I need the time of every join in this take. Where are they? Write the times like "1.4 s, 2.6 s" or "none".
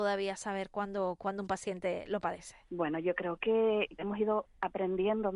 2.6 s, 4.0 s